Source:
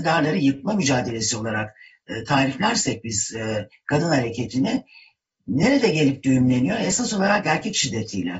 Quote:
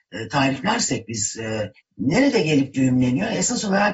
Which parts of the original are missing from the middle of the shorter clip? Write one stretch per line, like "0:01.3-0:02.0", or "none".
0:03.8-0:05.3